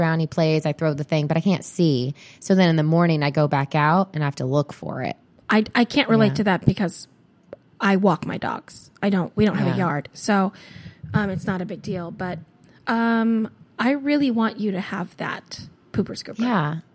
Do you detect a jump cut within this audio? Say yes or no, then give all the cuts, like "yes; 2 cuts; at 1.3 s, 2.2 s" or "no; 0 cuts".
no; 0 cuts